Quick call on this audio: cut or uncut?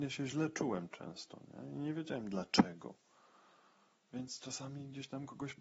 uncut